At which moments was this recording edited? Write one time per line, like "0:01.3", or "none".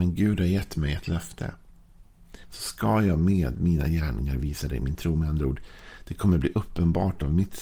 0:02.4